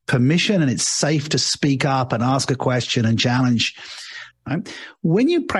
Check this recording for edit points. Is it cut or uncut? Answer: cut